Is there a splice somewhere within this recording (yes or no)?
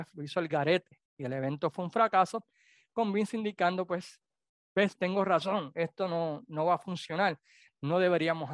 no